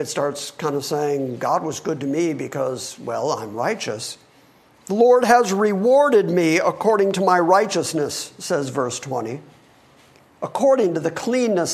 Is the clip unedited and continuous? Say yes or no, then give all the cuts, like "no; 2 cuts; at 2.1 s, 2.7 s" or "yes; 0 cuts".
no; 1 cut; at 4.7 s